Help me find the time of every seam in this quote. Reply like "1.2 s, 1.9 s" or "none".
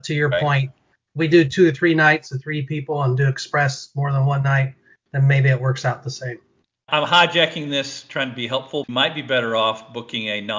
8.8 s